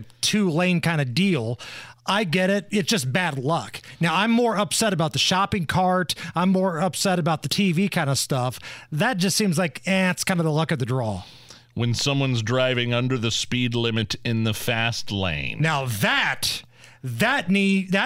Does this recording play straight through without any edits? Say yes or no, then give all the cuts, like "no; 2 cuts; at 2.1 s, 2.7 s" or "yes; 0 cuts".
yes; 0 cuts